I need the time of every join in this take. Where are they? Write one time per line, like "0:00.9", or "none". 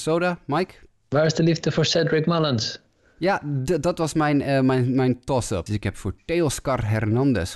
0:05.7